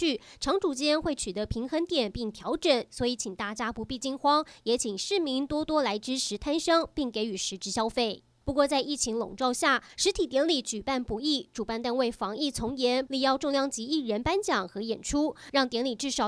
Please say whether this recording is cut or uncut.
cut